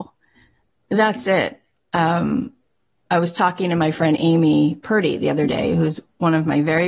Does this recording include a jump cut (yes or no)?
no